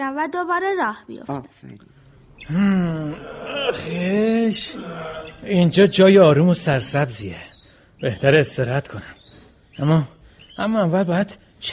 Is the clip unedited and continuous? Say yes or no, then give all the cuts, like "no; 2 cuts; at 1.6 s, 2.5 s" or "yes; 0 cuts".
yes; 0 cuts